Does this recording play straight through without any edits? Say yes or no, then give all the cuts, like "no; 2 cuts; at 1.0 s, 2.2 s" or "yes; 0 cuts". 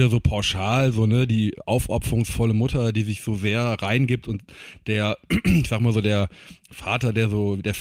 yes; 0 cuts